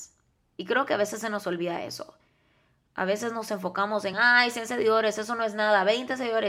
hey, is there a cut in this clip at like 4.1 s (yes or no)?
no